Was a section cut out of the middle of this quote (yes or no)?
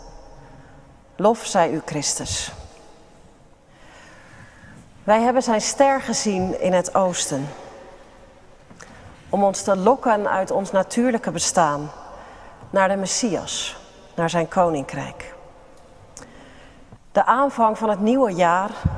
yes